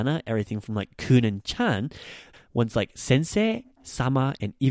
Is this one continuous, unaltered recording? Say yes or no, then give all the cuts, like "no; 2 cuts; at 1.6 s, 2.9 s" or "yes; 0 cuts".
no; 1 cut; at 2.3 s